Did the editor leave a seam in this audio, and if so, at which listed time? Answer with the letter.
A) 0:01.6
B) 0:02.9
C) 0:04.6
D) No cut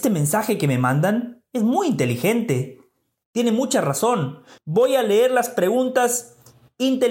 C